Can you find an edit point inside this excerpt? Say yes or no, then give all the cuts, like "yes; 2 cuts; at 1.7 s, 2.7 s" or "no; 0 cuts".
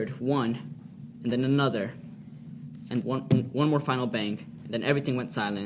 yes; 1 cut; at 3.0 s